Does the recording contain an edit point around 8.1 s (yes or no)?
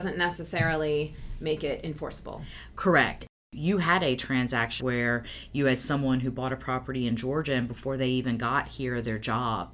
no